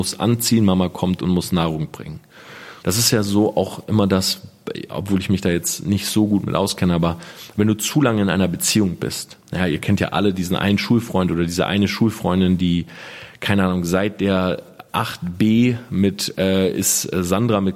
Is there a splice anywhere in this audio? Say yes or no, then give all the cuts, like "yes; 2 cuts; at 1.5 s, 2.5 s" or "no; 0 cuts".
yes; 1 cut; at 2.8 s